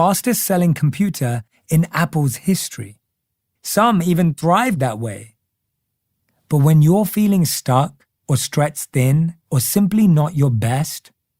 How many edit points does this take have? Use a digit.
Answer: 3